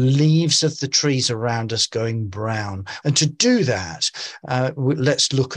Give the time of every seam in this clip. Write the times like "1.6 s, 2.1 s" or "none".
3.0 s